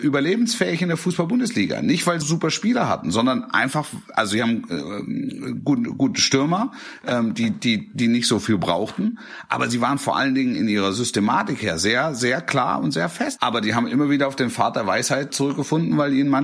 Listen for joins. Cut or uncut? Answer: cut